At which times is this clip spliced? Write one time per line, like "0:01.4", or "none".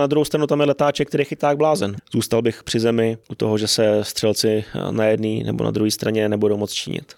0:02.0
0:03.2